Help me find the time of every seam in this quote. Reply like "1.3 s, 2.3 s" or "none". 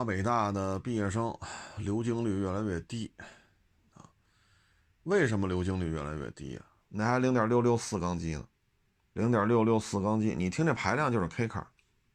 6.8 s, 9.1 s

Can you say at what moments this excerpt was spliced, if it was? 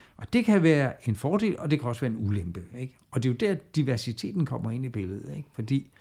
none

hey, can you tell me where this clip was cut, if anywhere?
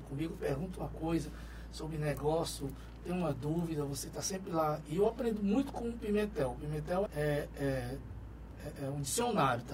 7.1 s, 8.8 s

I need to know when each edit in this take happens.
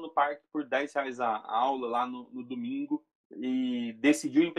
3.2 s

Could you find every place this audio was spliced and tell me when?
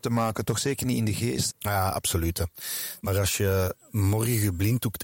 1.5 s, 3.0 s

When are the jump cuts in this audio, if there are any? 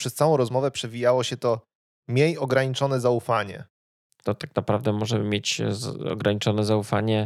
4.1 s

